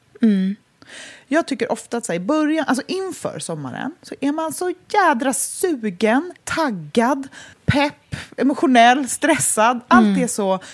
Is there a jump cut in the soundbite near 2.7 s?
no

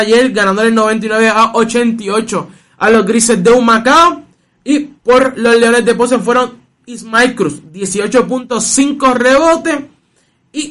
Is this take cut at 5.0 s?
yes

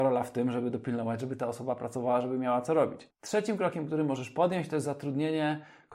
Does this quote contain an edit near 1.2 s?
no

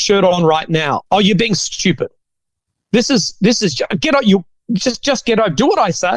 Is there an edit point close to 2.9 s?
no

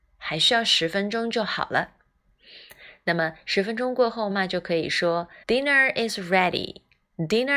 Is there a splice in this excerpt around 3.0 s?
no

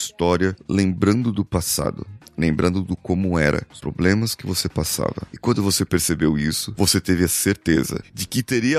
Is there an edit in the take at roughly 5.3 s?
yes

